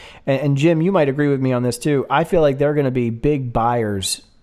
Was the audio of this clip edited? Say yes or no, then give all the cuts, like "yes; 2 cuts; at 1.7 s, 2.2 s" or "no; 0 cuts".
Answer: no; 0 cuts